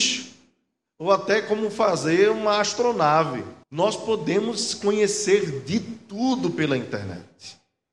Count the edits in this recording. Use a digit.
1